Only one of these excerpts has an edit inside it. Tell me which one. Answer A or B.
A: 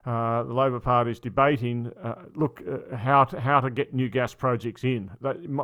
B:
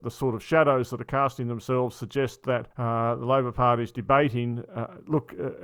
B